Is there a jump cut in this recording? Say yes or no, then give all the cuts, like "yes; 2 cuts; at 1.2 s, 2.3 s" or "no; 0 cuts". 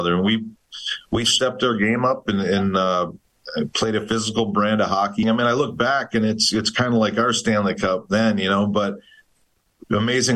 yes; 1 cut; at 5.2 s